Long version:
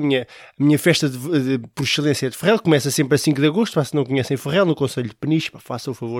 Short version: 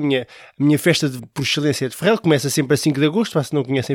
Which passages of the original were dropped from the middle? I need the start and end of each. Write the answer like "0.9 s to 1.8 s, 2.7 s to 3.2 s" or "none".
1.2 s to 1.6 s